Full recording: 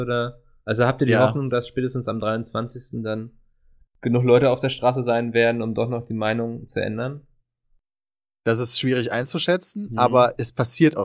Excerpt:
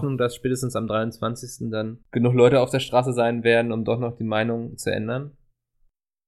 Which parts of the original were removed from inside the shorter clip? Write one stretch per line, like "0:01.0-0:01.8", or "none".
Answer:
0:03.3-0:03.9